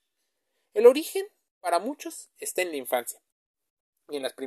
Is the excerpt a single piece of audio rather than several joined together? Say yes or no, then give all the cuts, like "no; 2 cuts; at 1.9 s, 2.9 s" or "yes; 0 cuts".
yes; 0 cuts